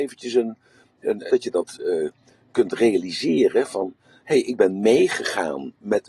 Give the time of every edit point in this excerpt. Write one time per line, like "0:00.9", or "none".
0:01.3